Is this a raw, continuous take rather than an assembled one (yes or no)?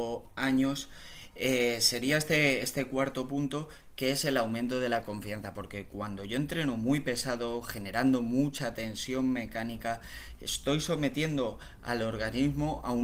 yes